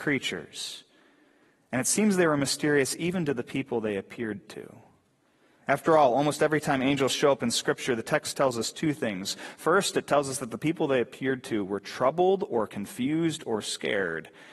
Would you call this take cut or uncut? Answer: uncut